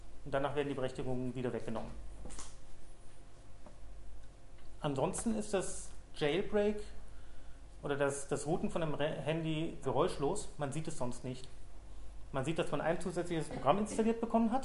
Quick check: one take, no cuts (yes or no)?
no